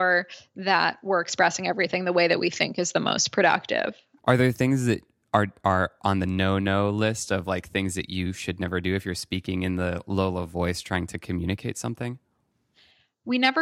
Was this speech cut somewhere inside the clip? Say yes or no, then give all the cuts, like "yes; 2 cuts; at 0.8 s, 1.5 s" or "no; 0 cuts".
yes; 1 cut; at 4.2 s